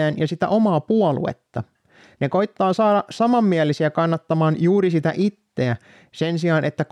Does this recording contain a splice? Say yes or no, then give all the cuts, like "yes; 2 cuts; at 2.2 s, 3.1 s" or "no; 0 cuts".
yes; 1 cut; at 2.1 s